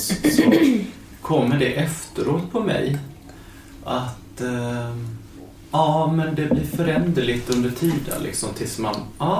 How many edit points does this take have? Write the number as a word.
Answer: zero